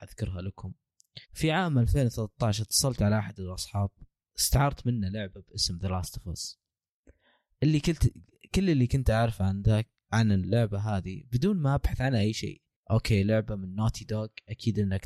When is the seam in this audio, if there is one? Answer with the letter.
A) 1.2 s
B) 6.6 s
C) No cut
A